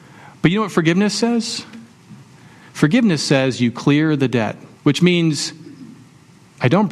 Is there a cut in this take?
yes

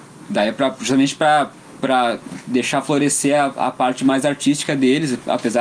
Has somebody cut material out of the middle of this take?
no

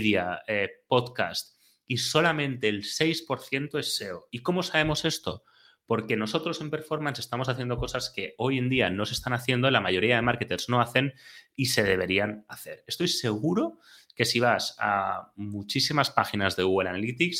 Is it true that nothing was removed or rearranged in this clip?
yes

